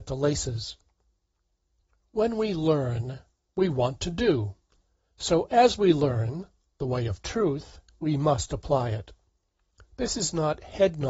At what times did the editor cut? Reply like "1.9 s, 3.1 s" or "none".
none